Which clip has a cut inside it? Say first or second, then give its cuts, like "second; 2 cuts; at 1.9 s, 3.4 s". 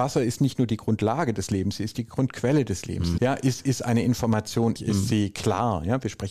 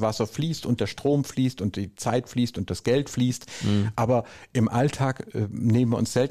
first; 2 cuts; at 3.2 s, 4.8 s